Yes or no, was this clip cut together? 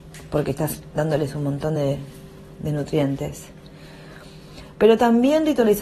no